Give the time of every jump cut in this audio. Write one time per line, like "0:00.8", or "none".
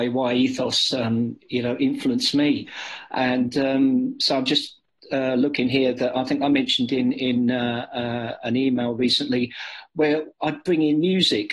0:03.1